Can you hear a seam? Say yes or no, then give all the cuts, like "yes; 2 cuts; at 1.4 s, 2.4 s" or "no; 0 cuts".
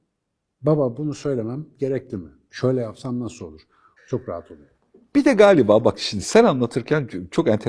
yes; 2 cuts; at 2.5 s, 4.0 s